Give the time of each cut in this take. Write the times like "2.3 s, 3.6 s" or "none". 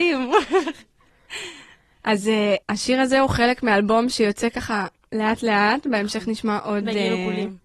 2.6 s

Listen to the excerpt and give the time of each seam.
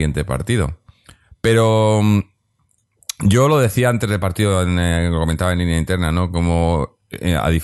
none

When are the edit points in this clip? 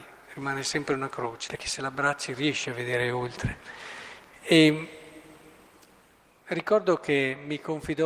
1.5 s

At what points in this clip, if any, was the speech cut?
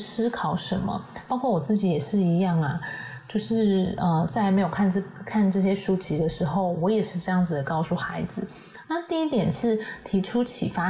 8.8 s

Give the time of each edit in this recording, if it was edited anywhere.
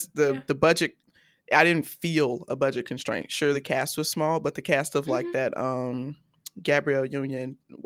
none

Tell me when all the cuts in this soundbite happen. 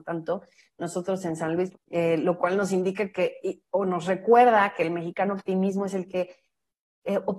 1.7 s

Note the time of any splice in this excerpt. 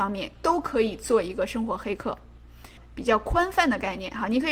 2.8 s

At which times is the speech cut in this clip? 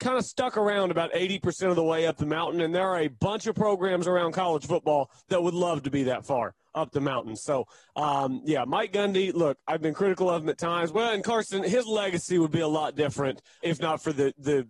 10.9 s, 13.6 s

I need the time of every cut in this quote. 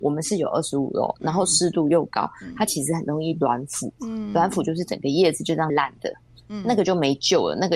5.7 s

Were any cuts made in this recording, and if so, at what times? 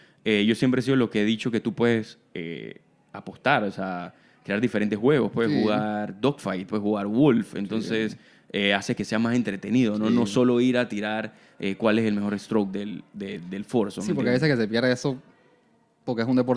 none

